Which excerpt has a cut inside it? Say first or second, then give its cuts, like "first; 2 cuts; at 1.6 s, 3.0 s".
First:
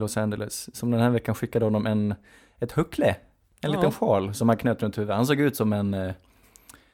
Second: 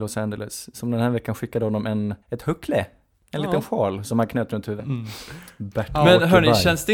second; 2 cuts; at 2.2 s, 4.8 s